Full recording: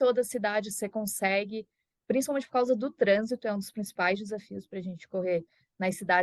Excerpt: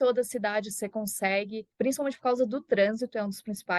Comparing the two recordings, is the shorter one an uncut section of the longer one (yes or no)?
no